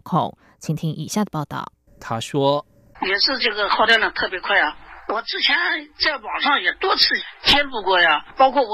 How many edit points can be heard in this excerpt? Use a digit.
1